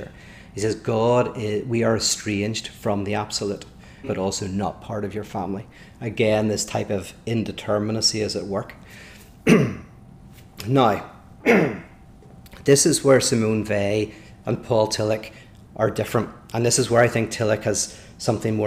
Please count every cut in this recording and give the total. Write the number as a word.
one